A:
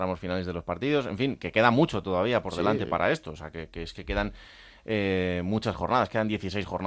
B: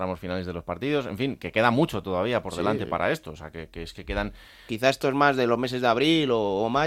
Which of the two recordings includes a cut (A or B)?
B